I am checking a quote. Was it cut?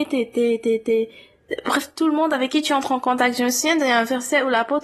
no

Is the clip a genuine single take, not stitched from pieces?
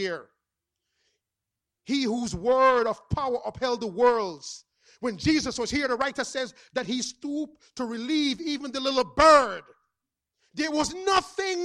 yes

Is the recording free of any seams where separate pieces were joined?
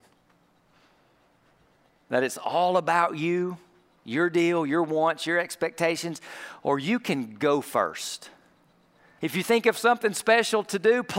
no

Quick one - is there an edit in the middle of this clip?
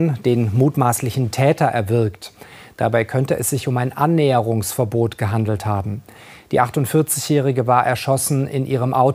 no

